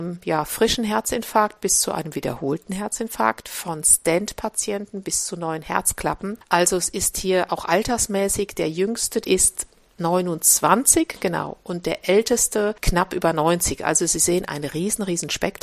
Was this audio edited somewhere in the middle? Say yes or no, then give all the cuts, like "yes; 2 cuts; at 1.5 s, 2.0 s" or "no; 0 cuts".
yes; 1 cut; at 9.2 s